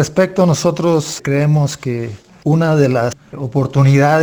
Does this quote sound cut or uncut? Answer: uncut